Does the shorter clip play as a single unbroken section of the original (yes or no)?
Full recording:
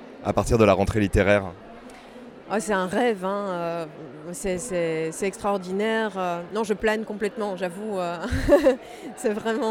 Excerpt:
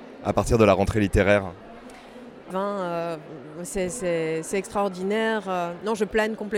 no